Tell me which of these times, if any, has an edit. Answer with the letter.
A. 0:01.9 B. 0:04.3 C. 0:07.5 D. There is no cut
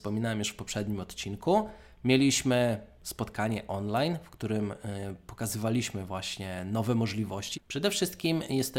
C